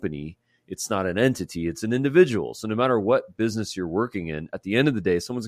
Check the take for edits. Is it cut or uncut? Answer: uncut